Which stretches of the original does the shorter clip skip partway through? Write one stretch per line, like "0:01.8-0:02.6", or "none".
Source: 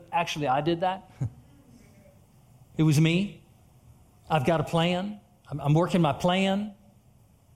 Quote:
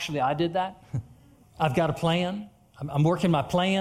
0:01.7-0:04.1